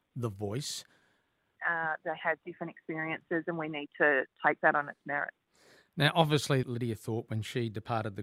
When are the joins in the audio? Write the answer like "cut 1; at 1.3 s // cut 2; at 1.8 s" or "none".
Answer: cut 1; at 1.6 s // cut 2; at 6.6 s